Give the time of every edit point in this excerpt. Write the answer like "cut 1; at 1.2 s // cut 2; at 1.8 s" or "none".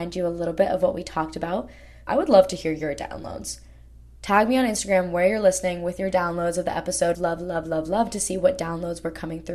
cut 1; at 2.1 s // cut 2; at 7.1 s